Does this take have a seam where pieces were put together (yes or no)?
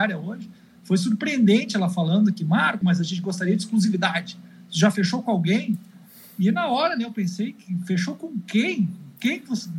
yes